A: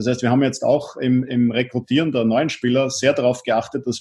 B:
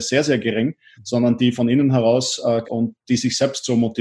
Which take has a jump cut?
B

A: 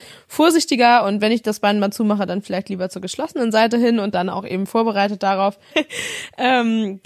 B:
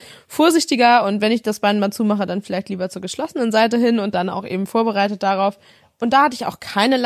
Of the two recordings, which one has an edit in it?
A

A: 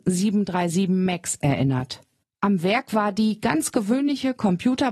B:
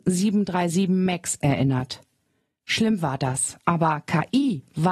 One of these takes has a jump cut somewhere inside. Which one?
A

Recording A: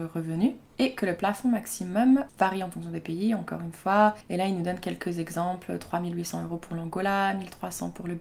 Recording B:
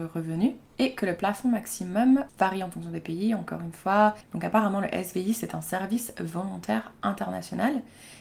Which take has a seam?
B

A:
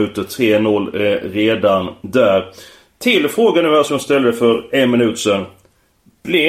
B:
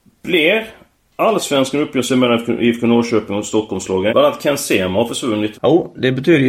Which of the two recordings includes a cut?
B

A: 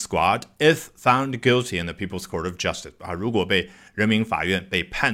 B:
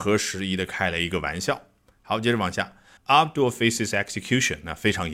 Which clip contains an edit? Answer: B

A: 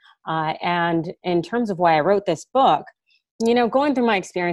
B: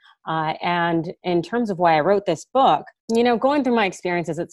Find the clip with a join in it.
B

